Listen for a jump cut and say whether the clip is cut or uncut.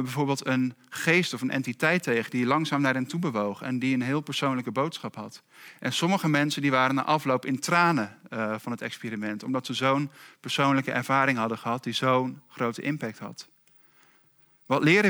uncut